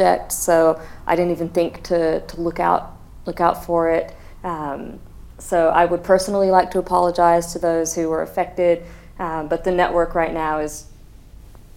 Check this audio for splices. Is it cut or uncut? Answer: uncut